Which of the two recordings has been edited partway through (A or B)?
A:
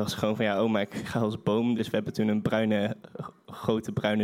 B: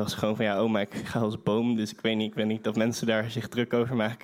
A